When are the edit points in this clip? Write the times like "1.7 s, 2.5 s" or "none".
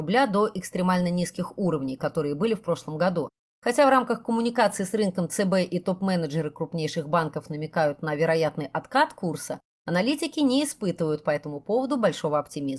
3.5 s